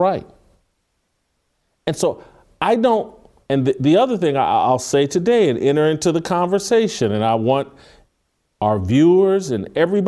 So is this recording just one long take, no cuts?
yes; 0 cuts

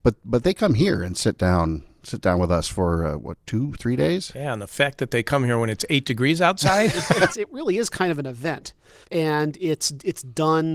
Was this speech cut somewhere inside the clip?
yes; 2 cuts; at 7.3 s, 9.0 s

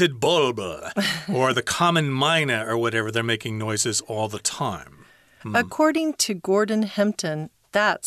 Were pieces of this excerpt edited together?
yes; 1 cut; at 5.4 s

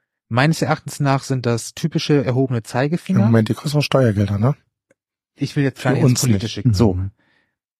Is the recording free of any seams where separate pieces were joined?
no; 1 cut; at 6.6 s

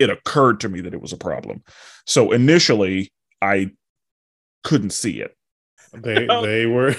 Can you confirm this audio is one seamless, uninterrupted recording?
no; 1 cut; at 5.8 s

